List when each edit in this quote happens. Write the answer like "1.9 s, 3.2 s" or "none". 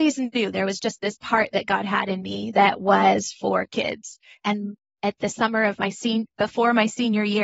4.4 s